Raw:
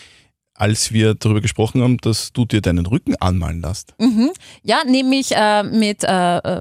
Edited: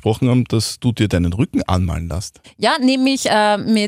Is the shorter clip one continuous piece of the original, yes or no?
no